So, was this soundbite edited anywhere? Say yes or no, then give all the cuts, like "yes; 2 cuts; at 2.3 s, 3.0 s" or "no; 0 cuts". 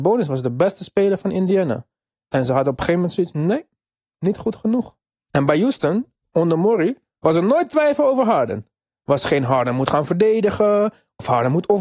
yes; 1 cut; at 5.3 s